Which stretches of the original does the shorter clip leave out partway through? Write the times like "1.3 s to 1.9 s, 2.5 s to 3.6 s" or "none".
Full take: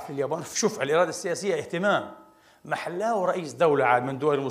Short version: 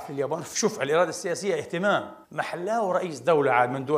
2.2 s to 2.6 s